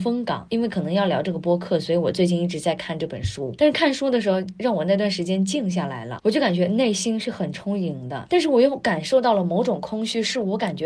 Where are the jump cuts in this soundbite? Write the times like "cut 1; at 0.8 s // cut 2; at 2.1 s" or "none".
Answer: none